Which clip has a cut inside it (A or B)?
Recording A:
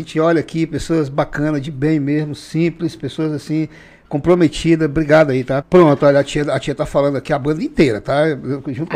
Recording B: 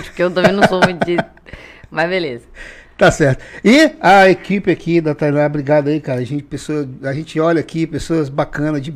A